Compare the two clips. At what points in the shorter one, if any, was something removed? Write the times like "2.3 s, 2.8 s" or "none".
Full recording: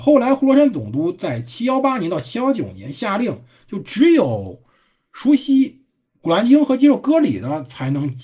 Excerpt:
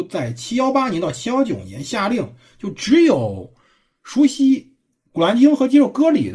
none